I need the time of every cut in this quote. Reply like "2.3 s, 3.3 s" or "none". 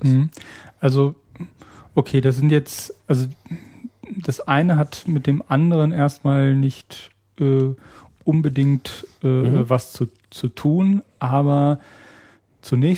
none